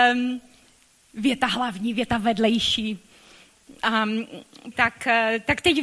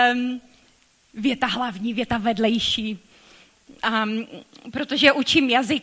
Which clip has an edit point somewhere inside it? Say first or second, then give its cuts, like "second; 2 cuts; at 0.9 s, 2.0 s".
first; 1 cut; at 4.7 s